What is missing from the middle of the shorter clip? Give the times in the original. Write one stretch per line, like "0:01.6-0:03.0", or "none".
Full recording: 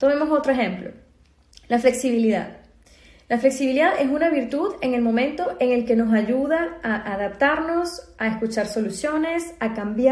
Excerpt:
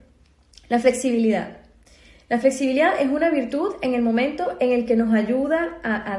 none